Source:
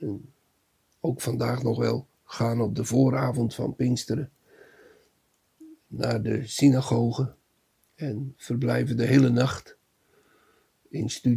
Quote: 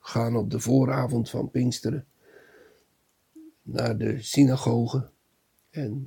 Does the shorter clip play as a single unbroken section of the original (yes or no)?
yes